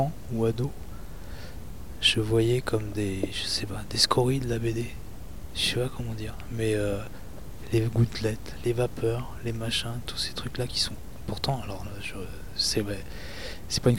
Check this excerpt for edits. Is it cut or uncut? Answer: uncut